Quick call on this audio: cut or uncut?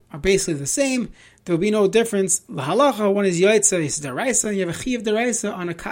uncut